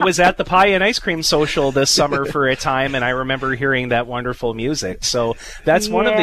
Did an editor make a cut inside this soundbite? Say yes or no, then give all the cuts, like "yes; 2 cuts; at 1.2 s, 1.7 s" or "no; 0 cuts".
no; 0 cuts